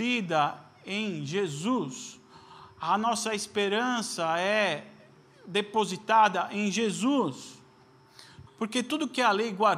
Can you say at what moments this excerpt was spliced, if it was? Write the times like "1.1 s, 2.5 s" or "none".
8.5 s